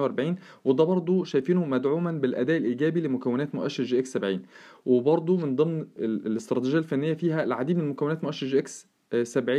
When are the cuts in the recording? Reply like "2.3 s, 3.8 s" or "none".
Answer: 6.0 s